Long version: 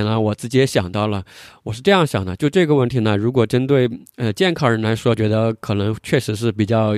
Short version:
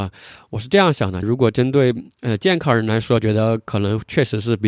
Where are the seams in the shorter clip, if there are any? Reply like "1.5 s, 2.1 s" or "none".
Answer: 1.2 s